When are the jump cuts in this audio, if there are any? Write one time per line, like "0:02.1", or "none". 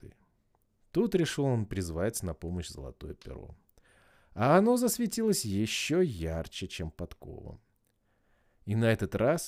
none